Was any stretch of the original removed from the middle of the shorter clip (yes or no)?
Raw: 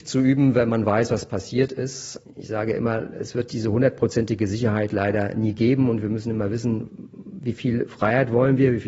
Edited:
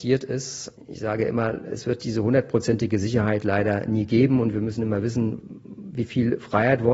no